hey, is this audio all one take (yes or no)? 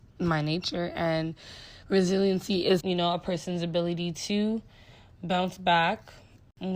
no